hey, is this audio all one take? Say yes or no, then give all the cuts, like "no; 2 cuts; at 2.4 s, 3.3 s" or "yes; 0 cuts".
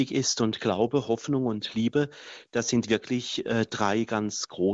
yes; 0 cuts